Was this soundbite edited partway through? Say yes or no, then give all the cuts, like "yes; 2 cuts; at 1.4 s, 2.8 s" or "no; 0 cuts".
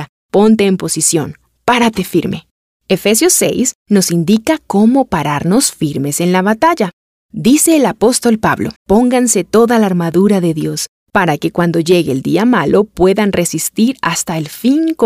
yes; 1 cut; at 8.8 s